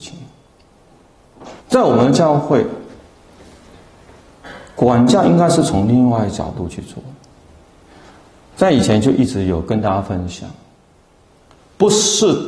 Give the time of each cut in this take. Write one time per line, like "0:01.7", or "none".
0:01.6